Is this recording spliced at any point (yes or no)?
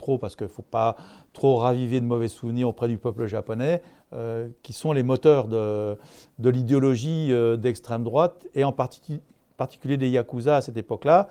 no